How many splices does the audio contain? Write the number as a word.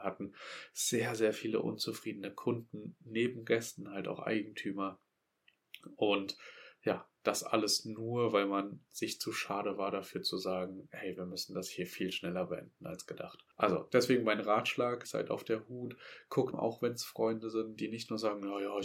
three